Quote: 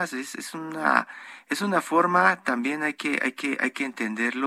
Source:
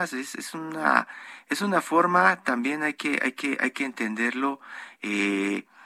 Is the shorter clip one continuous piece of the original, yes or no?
yes